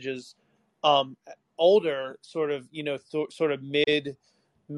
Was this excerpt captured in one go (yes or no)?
yes